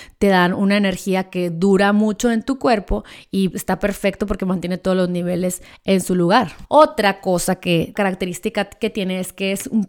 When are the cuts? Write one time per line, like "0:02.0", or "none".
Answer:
0:03.5
0:06.6

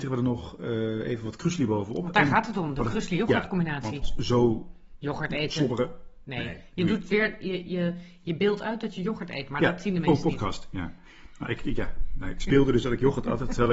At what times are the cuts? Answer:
0:04.0

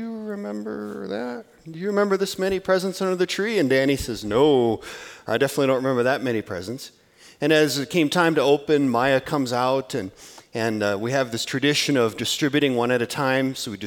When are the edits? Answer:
none

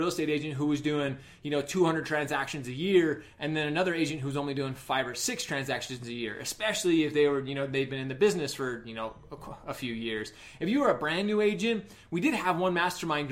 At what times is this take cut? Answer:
none

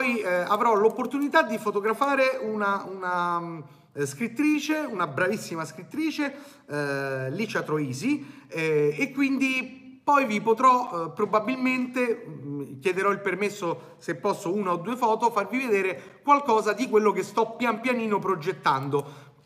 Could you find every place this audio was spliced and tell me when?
none

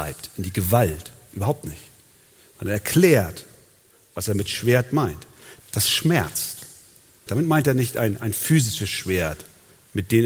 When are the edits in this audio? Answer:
0:05.6
0:07.3

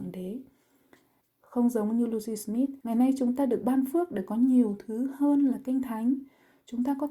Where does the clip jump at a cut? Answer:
0:01.2
0:02.8

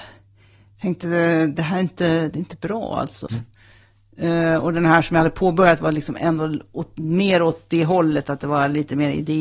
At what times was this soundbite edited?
0:03.3

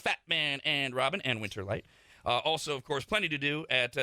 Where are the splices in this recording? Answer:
none

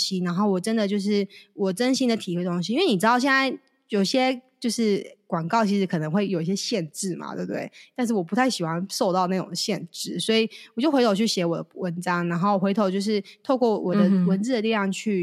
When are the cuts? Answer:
none

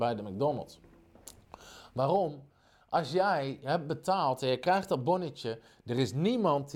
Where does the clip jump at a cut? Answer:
none

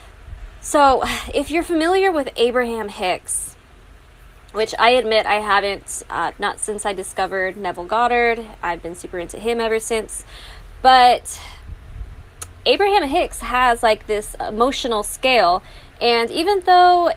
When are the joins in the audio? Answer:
0:06.3

